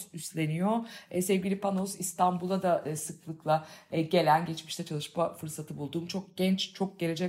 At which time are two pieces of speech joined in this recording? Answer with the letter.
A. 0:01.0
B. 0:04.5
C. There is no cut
C